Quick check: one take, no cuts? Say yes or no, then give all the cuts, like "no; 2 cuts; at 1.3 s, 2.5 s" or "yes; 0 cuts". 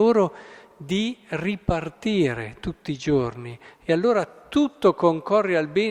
yes; 0 cuts